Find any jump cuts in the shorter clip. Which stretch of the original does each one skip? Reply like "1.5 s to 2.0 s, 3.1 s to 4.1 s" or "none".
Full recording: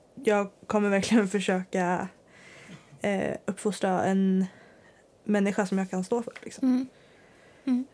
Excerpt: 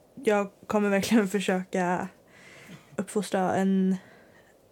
3.0 s to 3.4 s